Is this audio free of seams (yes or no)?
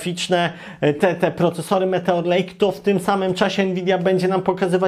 yes